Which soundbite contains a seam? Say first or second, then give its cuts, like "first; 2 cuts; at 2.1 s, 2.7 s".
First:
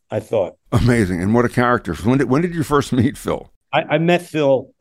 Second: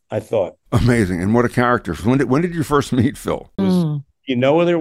second; 1 cut; at 3.6 s